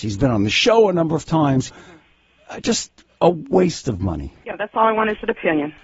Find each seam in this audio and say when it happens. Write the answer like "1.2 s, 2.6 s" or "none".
1.7 s, 4.4 s

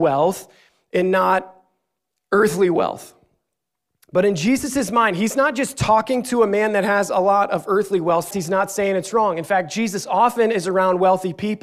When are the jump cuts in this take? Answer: 8.3 s

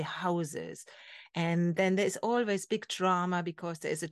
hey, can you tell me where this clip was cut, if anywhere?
none

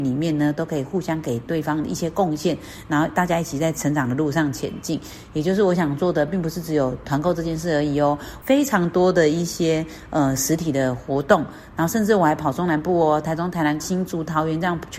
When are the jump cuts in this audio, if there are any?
8.4 s, 13.8 s

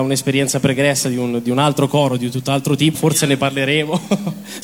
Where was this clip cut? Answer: 2.9 s

